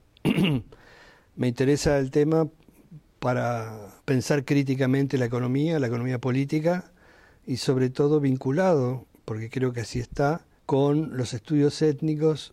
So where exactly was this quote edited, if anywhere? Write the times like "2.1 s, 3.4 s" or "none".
4.0 s, 10.6 s

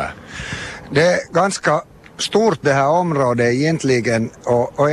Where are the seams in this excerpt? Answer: none

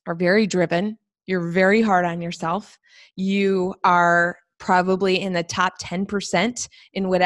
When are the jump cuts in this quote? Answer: none

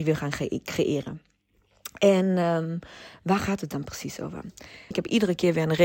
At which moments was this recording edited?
4.9 s

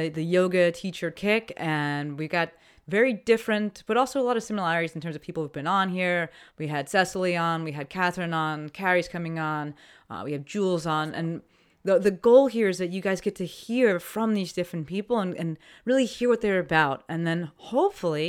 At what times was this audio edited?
none

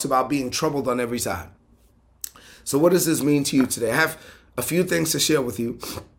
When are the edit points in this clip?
none

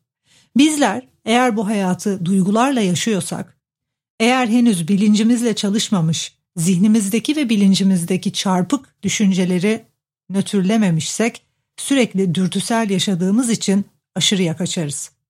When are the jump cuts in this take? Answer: none

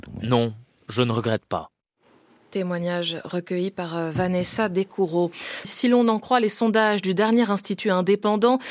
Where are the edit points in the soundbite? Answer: 5.6 s

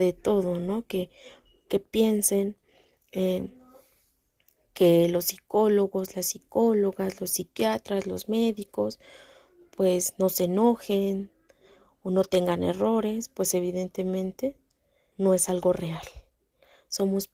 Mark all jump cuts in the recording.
15.1 s

